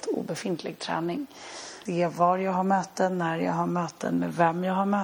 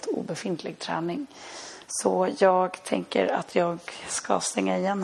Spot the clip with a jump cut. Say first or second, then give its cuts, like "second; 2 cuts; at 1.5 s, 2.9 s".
first; 1 cut; at 1.9 s